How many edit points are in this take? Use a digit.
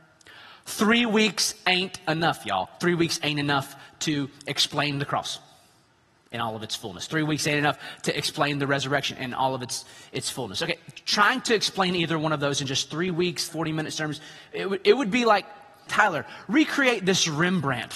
2